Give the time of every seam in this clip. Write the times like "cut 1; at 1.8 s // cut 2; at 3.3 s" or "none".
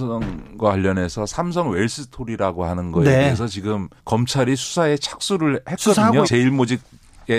cut 1; at 4.0 s // cut 2; at 6.2 s